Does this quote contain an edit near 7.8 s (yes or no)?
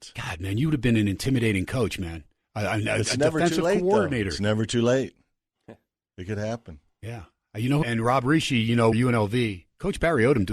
yes